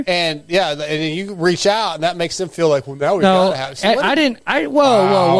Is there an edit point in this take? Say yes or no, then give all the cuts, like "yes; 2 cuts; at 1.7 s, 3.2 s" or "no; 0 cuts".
no; 0 cuts